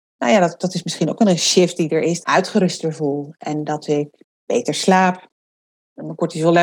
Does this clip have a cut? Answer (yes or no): yes